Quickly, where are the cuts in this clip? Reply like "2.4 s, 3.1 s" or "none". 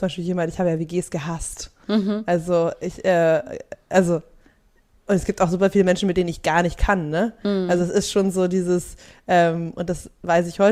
none